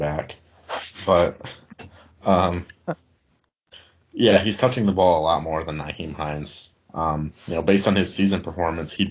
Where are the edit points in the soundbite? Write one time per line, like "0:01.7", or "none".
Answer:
0:06.7